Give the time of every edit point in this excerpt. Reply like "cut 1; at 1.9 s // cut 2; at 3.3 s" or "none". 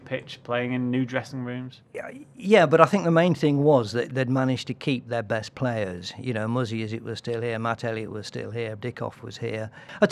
cut 1; at 8.8 s